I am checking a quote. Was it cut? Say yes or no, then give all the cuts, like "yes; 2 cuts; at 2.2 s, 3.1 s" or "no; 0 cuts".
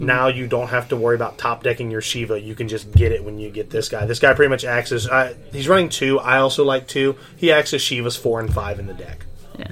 no; 0 cuts